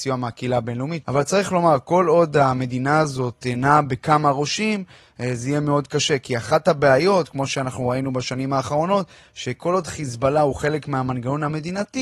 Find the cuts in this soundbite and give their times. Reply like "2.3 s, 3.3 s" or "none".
1.0 s